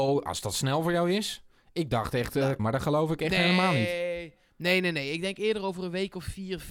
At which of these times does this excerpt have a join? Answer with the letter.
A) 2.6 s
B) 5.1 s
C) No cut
A